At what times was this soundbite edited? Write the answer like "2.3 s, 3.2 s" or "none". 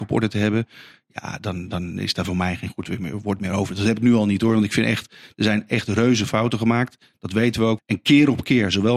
7.8 s